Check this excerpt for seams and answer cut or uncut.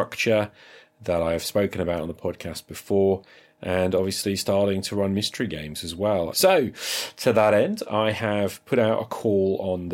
cut